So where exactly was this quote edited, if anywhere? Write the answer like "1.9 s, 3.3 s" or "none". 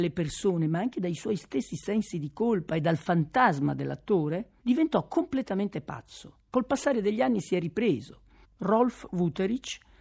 6.5 s, 8.4 s